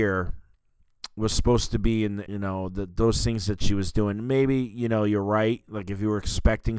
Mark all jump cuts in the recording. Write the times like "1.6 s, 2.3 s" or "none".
2.3 s